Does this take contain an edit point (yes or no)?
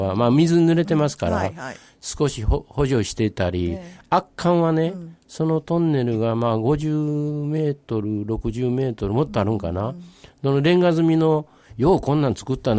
no